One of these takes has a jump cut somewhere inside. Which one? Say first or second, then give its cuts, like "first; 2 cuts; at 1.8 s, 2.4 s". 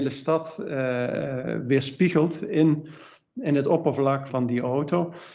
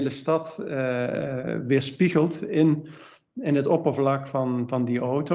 first; 1 cut; at 4.3 s